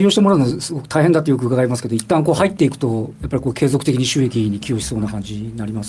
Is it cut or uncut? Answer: uncut